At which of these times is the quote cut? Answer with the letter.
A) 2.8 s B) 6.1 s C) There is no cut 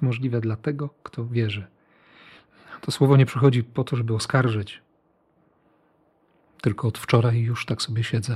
C